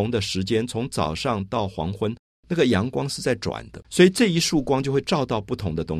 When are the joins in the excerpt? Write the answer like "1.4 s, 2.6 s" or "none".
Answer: 3.8 s

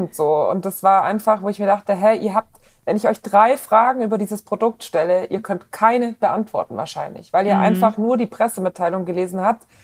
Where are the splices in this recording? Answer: none

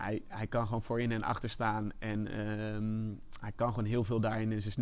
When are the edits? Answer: none

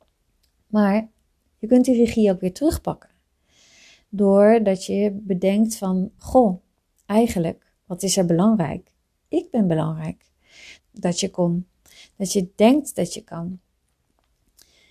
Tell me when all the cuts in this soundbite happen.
6.2 s, 7.8 s, 10.8 s

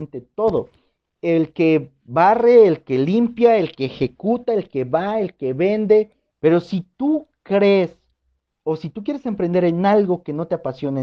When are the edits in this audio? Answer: 6.3 s

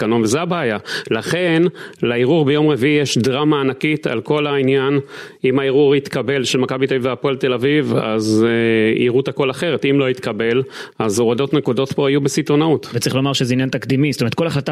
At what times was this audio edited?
none

